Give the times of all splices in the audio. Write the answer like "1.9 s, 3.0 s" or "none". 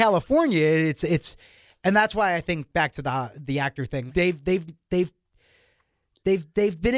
4.1 s